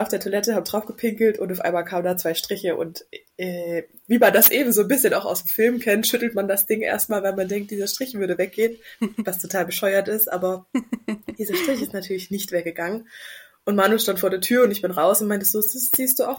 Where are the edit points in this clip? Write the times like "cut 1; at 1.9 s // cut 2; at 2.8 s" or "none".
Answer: none